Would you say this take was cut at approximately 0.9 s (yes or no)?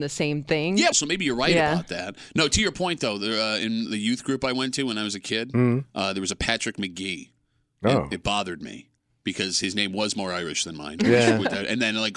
yes